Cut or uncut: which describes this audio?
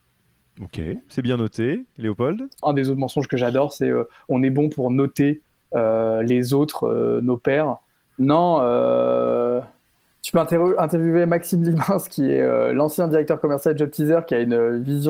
cut